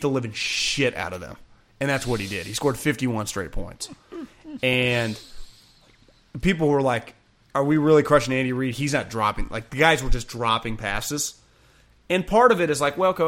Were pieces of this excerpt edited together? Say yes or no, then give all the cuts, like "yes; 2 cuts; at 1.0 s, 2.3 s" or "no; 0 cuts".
no; 0 cuts